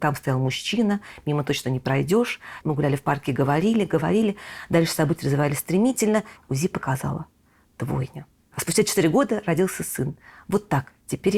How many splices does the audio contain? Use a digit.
2